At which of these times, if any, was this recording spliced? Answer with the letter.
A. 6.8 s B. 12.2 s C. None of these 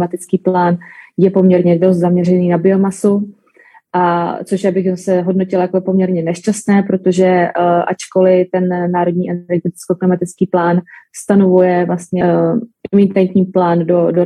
B